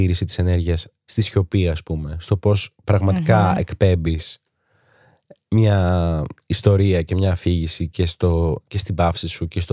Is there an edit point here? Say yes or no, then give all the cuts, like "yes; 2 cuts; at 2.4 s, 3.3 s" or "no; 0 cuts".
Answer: no; 0 cuts